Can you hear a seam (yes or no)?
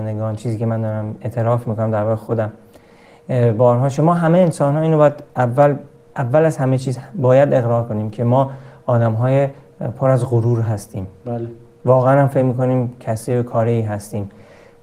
no